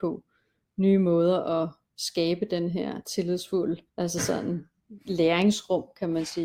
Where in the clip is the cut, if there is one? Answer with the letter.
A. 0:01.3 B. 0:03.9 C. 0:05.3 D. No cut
B